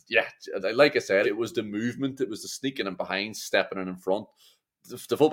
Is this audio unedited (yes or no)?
no